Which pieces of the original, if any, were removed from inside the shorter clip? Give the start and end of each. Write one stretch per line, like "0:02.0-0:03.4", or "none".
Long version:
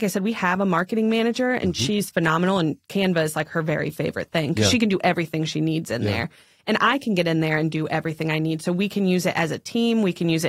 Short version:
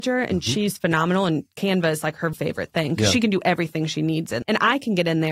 0:03.7-0:03.9
0:06.0-0:06.6

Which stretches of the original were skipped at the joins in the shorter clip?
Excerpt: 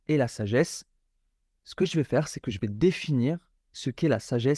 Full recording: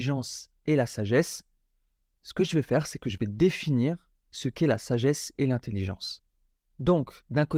none

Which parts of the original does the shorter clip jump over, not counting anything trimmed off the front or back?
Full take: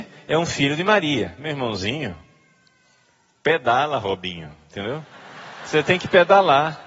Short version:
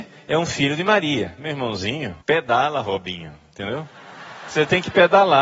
0:02.2-0:03.4

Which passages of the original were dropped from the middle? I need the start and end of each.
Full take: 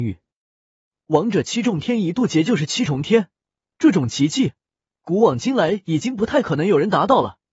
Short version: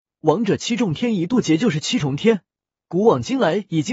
0:03.7-0:05.0

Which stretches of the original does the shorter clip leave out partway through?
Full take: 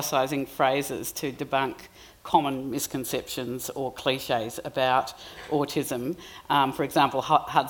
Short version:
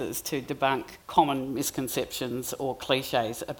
0:01.9-0:02.2

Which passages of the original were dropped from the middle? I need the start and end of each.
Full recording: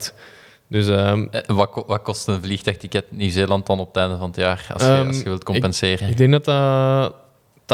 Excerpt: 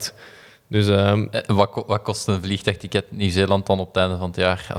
none

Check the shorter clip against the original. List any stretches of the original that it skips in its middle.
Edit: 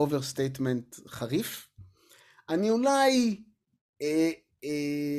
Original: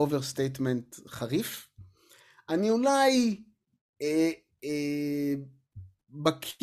none

